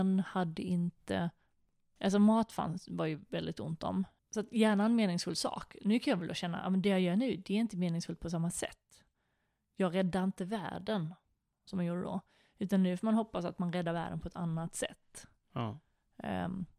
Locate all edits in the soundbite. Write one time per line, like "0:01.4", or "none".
0:04.2